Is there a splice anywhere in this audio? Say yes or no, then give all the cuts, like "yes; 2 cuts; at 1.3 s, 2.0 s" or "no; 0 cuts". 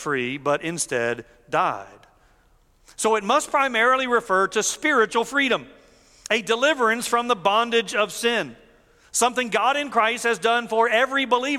no; 0 cuts